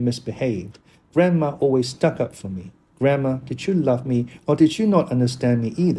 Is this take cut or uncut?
uncut